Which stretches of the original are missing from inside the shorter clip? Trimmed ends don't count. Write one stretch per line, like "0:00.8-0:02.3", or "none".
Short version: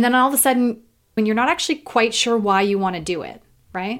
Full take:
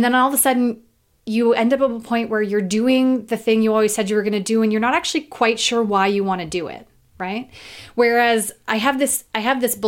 0:01.2-0:04.6